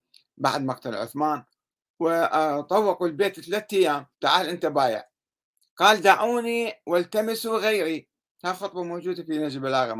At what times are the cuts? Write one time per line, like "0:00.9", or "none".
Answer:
0:04.1